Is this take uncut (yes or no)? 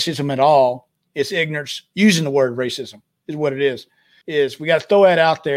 no